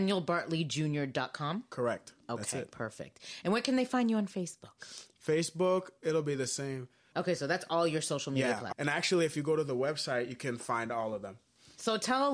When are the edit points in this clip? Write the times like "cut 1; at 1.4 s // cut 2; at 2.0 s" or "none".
cut 1; at 7.1 s // cut 2; at 8.7 s